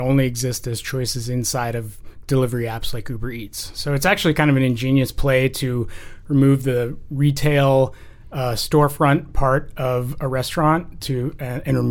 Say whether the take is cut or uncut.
uncut